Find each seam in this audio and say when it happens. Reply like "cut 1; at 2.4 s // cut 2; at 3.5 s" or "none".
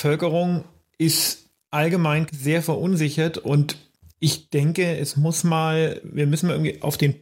cut 1; at 2.3 s